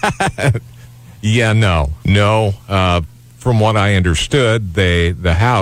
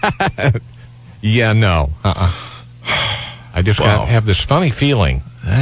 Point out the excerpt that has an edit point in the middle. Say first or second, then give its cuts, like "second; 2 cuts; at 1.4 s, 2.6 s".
first; 1 cut; at 2.0 s